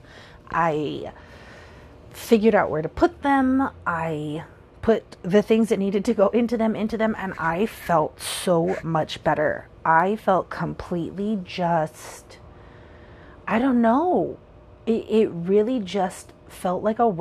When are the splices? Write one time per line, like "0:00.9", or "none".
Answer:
none